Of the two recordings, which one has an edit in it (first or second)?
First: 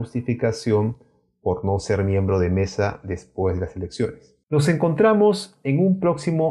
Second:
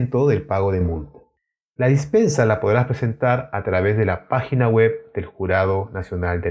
first